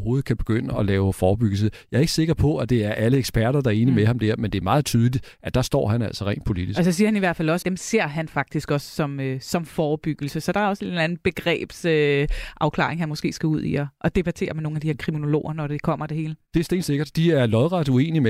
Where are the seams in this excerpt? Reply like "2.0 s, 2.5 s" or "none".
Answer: 7.6 s

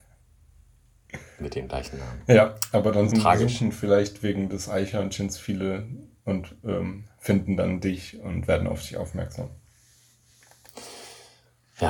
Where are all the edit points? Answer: 3.1 s

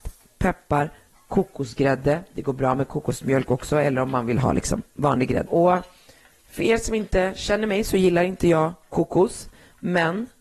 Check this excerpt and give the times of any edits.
5.5 s

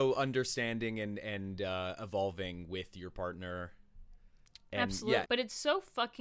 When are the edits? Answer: 5.2 s

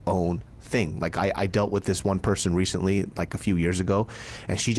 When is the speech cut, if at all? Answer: none

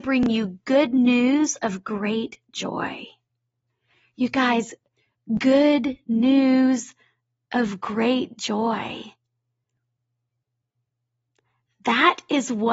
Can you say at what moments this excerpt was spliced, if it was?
none

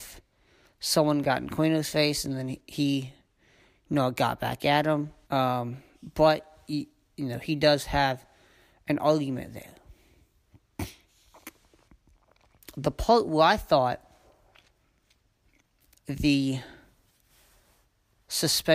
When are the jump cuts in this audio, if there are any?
5.2 s

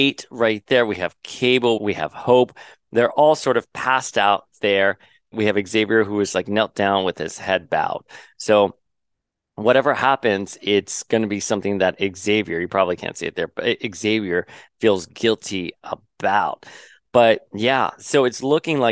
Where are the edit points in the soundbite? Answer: 1.8 s

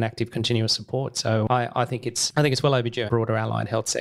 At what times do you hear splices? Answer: 3.1 s

